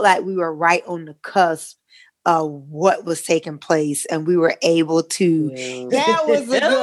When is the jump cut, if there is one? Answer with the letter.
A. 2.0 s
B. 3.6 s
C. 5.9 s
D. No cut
C